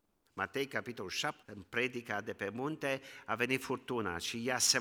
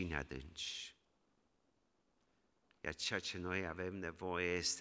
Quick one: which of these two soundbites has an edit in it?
first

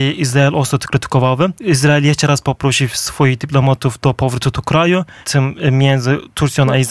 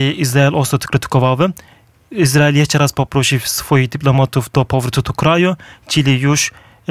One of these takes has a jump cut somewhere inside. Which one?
first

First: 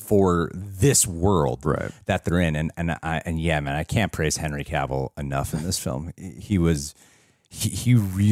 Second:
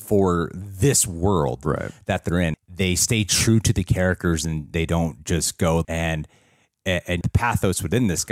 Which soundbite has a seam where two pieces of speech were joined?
second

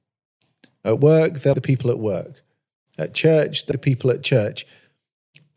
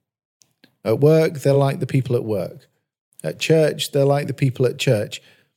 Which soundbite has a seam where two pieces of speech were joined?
first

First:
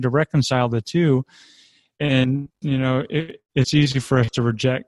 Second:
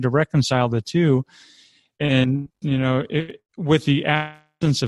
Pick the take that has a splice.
first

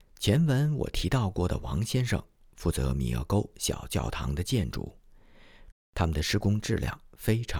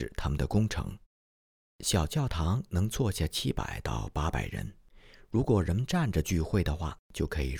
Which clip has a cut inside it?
first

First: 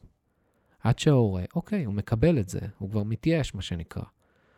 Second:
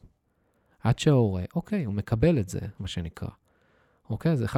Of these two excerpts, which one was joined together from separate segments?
second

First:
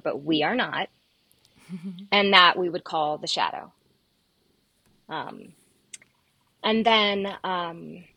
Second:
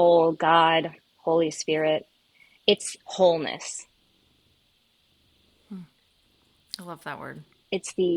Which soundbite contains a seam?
second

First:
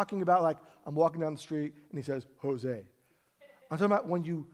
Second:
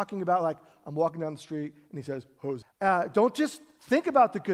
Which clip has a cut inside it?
second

